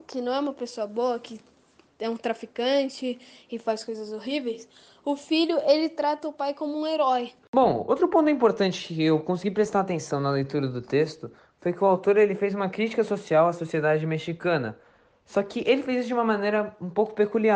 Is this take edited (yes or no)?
yes